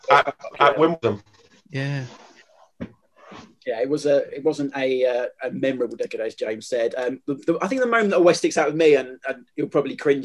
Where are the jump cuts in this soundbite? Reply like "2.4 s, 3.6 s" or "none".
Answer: none